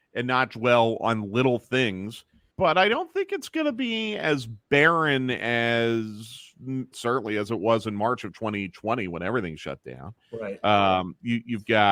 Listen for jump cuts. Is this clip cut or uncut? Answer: cut